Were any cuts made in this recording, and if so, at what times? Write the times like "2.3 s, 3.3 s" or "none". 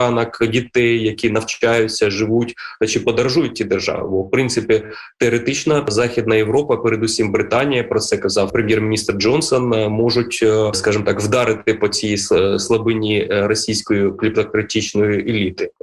none